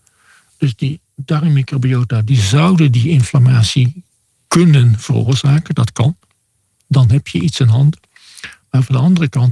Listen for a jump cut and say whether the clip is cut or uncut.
uncut